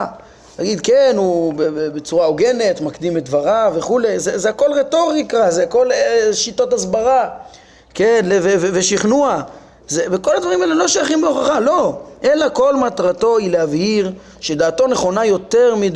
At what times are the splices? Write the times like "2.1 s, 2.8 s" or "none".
none